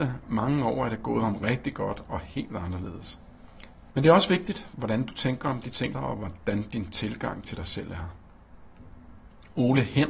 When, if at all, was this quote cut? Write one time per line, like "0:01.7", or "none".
0:03.9
0:05.9